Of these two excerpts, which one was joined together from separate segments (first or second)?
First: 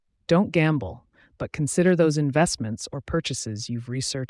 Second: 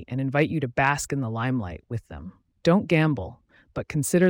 second